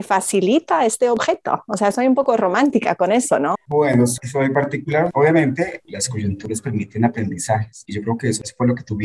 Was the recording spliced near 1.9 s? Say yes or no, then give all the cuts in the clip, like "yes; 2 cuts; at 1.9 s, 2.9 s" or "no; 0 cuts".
no; 1 cut; at 3.5 s